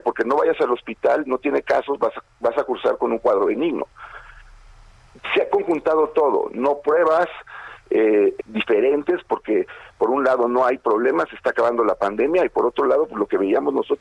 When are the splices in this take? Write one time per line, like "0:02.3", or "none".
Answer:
0:08.4

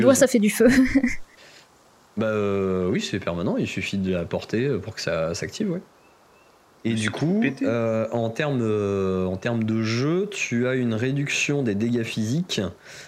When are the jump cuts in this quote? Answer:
none

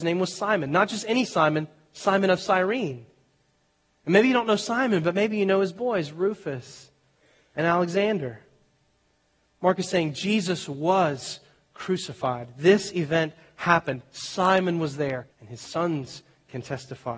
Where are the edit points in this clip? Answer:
0:15.3

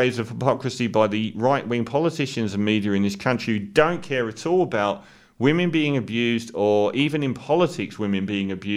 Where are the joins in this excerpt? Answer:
none

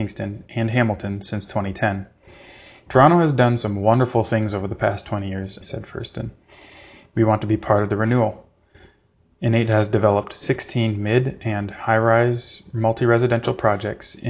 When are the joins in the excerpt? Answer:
0:02.9
0:05.6

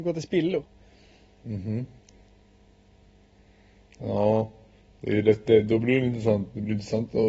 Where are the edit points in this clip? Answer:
none

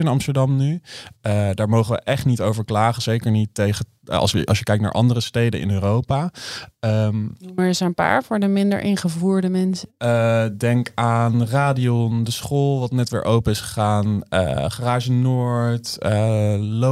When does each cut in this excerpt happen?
none

